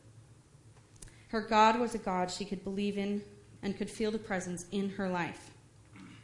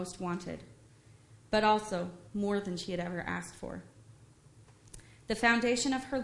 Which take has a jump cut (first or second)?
first